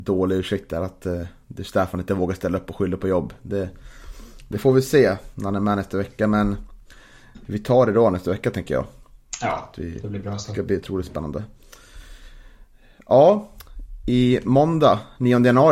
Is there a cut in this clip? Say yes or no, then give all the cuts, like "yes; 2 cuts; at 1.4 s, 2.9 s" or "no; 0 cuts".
no; 0 cuts